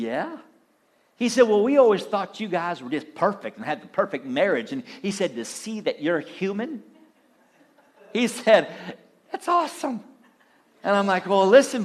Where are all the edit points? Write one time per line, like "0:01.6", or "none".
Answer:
none